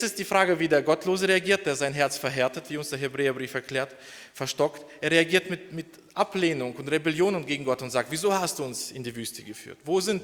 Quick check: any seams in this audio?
no; 0 cuts

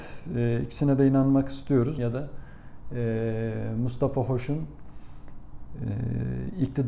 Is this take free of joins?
no; 1 cut; at 2.0 s

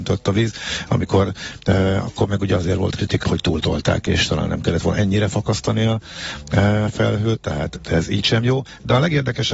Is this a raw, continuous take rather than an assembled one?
no; 1 cut; at 3.2 s

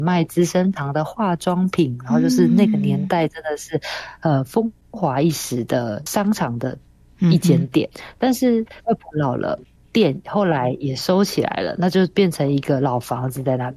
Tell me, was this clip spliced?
yes; 1 cut; at 8.8 s

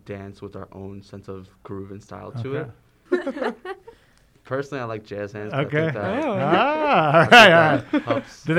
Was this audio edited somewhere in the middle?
yes; 1 cut; at 3.1 s

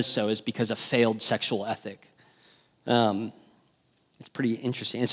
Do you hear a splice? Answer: no; 0 cuts

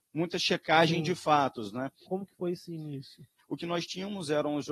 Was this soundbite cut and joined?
yes; 2 cuts; at 2.1 s, 3.4 s

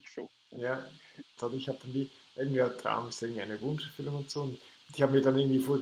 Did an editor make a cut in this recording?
yes; 1 cut; at 1.4 s

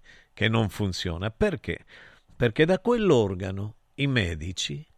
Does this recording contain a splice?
no; 0 cuts

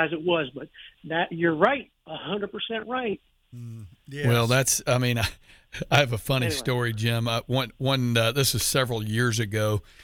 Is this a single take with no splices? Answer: no; 1 cut; at 3.4 s

